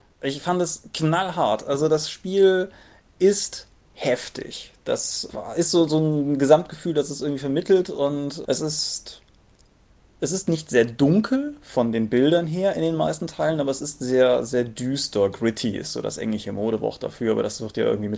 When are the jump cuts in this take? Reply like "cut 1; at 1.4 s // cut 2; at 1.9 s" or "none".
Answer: none